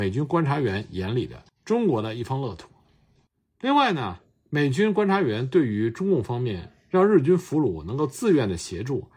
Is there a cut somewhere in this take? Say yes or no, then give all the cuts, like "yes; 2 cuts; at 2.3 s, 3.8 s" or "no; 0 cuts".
no; 0 cuts